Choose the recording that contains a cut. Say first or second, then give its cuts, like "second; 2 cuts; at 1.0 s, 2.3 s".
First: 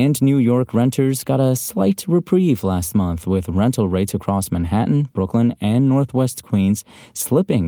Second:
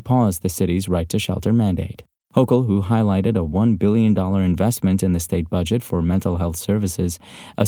second; 1 cut; at 2.2 s